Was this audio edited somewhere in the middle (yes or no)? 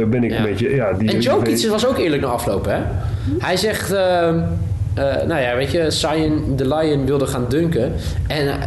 no